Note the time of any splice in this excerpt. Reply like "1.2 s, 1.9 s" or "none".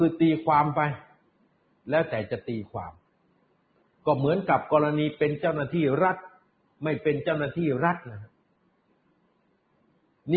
none